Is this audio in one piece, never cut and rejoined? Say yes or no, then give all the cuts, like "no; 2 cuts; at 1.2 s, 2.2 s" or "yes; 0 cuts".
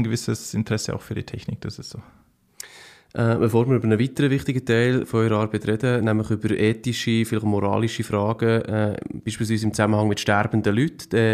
yes; 0 cuts